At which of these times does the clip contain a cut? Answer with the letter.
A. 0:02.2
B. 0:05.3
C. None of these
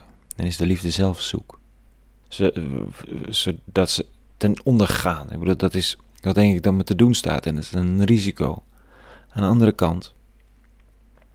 A